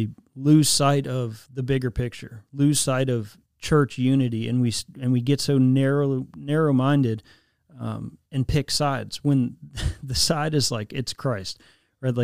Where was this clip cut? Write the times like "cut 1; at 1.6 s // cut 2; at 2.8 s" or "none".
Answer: cut 1; at 3.5 s // cut 2; at 8.3 s